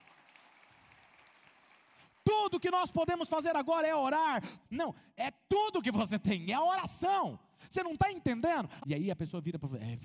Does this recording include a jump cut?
yes; 2 cuts; at 4.6 s, 8.8 s

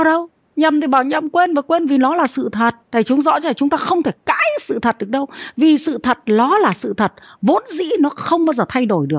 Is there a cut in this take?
yes; 1 cut; at 2.8 s

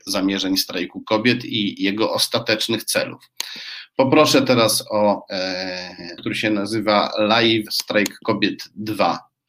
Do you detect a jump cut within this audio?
yes; 1 cut; at 6.2 s

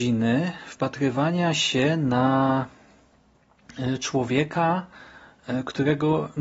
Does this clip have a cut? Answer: no; 0 cuts

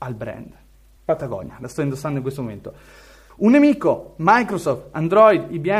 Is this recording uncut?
no; 2 cuts; at 1.0 s, 3.3 s

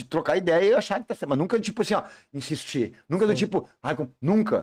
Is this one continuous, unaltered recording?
yes; 0 cuts

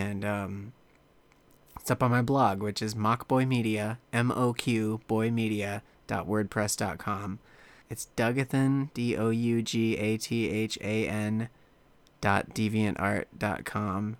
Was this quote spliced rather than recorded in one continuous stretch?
yes; 1 cut; at 7.8 s

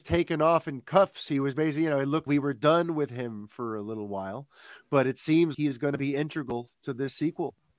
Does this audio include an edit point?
yes; 2 cuts; at 2.3 s, 5.5 s

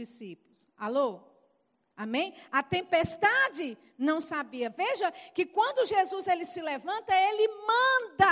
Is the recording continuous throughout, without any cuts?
yes; 0 cuts

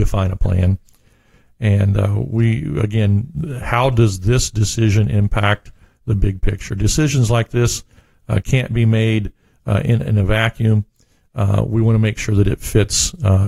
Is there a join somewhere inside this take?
no; 0 cuts

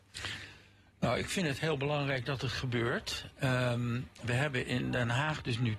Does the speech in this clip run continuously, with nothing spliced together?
yes; 0 cuts

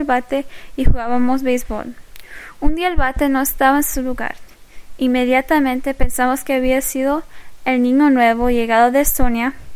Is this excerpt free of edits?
yes; 0 cuts

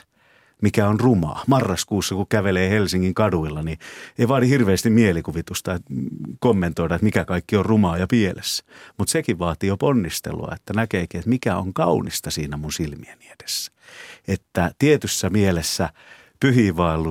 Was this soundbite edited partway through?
no; 0 cuts

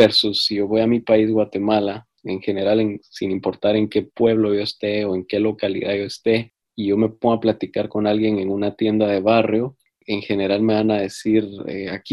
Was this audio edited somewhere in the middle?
no; 0 cuts

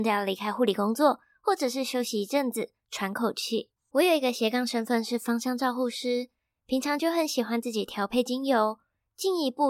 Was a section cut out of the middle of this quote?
yes; 1 cut; at 3.8 s

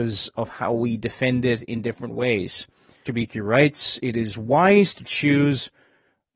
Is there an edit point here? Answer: yes; 1 cut; at 3.0 s

